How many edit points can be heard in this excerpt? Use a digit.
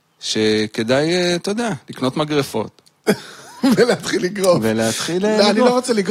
0